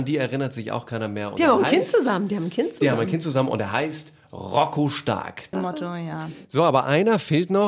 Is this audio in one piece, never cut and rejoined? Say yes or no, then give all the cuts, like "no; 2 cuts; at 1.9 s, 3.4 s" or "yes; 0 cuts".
no; 1 cut; at 5.5 s